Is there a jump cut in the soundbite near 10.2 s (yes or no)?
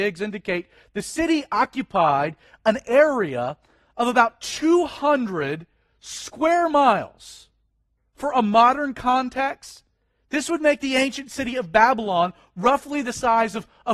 no